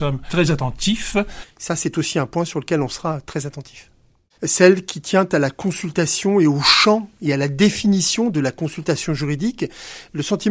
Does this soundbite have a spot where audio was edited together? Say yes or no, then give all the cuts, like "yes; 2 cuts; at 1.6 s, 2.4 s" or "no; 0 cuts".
yes; 2 cuts; at 1.4 s, 4.4 s